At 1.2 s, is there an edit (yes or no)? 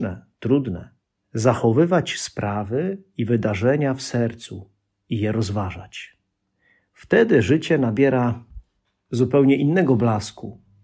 yes